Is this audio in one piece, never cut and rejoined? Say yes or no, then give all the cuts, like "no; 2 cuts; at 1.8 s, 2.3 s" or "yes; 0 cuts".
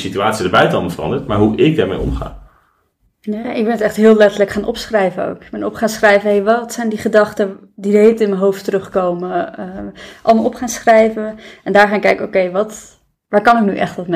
yes; 0 cuts